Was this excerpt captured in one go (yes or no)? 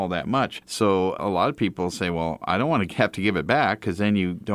yes